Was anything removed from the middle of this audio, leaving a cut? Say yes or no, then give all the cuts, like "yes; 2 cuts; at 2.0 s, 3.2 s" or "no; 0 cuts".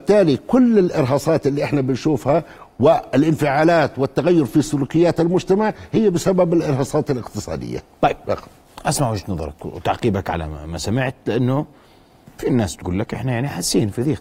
no; 0 cuts